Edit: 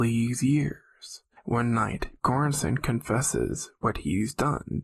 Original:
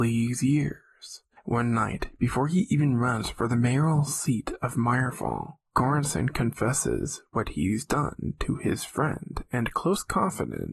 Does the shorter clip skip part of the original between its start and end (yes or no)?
yes